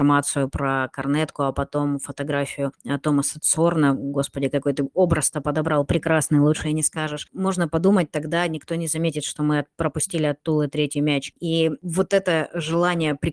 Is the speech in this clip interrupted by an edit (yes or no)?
no